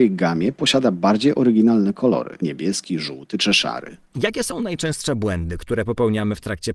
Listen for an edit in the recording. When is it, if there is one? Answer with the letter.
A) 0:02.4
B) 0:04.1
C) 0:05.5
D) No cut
A